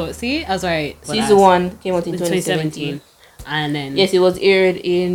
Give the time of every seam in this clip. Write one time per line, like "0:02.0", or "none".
0:01.0